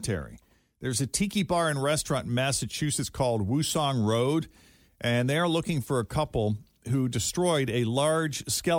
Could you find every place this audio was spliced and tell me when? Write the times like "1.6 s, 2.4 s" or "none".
none